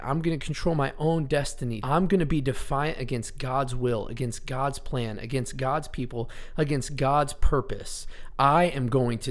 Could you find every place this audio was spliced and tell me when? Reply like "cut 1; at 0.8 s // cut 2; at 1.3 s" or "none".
cut 1; at 1.8 s // cut 2; at 8.3 s